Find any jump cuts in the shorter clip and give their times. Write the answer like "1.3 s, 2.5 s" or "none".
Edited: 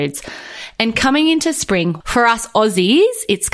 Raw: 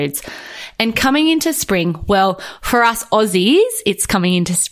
2.0 s